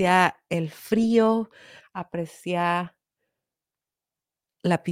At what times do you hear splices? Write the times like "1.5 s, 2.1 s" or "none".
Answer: 1.8 s